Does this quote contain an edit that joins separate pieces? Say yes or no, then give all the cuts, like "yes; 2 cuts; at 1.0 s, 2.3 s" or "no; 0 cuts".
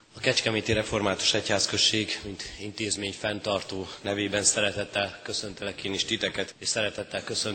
yes; 1 cut; at 6.5 s